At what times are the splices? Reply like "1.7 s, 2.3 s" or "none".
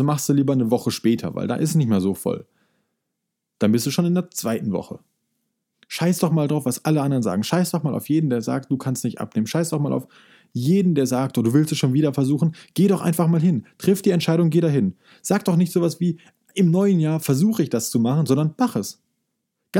5.7 s